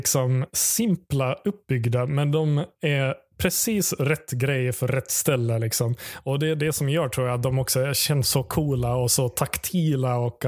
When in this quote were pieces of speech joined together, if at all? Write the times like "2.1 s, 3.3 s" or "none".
8.2 s